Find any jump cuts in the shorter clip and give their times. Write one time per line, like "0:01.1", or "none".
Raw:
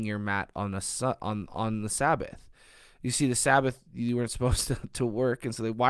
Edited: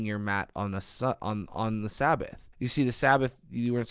0:02.5